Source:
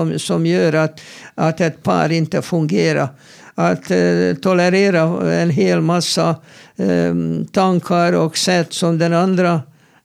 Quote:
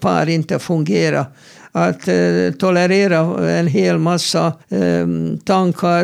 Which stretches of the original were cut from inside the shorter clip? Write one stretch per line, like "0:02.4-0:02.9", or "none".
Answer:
0:06.4-0:06.7